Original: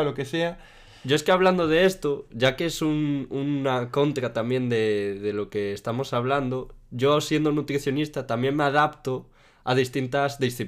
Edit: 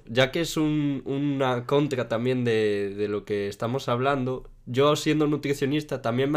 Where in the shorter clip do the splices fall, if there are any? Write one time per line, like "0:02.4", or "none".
none